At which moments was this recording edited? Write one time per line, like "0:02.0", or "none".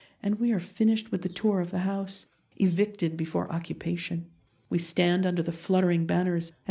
none